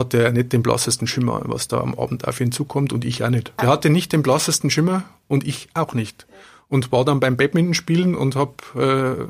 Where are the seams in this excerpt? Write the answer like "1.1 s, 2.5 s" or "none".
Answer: 3.6 s

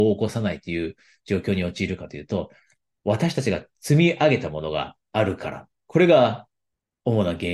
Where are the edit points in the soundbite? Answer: none

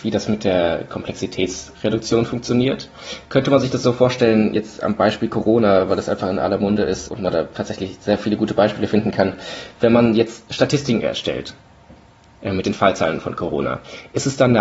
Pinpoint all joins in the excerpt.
7.1 s

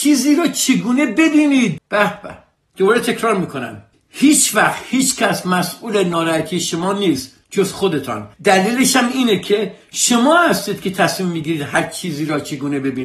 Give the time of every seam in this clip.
1.8 s, 8.3 s

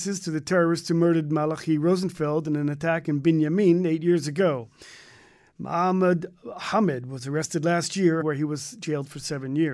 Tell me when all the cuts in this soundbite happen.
8.2 s

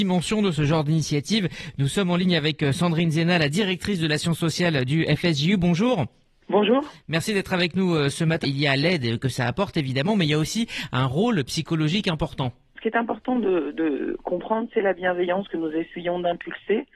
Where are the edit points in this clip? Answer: 8.4 s, 12.8 s

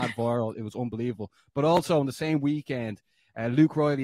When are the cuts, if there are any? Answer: none

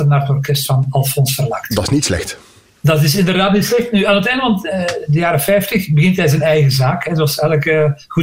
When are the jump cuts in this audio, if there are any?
none

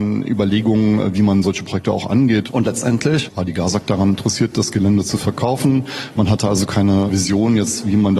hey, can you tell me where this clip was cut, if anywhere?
2.5 s

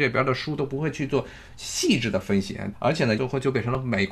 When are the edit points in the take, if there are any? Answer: 3.2 s

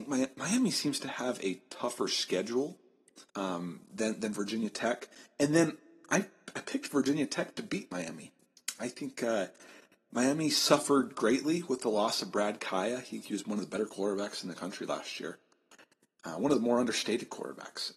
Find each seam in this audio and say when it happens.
3.3 s

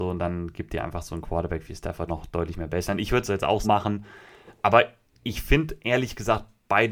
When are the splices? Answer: 2.1 s, 3.6 s

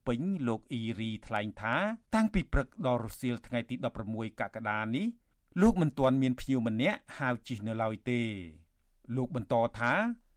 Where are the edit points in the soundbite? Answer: 2.0 s

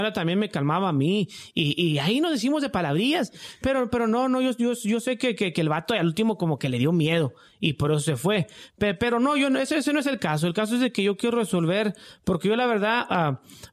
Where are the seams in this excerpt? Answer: none

